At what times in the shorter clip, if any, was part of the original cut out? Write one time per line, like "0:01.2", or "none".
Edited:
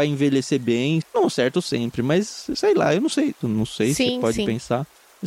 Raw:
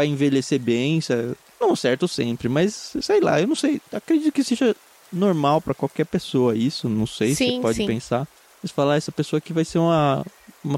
0:01.0
0:03.4